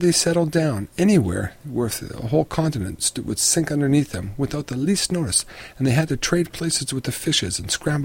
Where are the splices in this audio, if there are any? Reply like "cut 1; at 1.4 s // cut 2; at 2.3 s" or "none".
cut 1; at 3.0 s